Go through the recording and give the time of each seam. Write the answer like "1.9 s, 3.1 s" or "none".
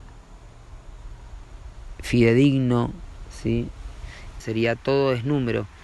4.4 s